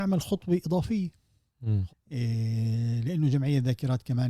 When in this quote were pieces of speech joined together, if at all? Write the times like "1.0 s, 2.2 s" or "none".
1.9 s